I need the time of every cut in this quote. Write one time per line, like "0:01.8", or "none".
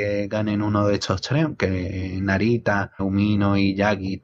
0:03.0